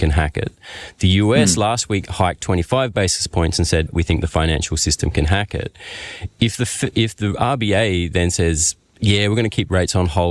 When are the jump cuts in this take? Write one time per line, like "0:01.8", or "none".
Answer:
0:03.9